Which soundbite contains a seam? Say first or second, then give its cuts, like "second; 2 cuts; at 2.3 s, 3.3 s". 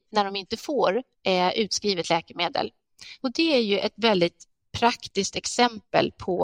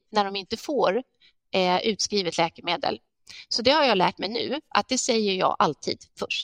first; 2 cuts; at 1.1 s, 3.2 s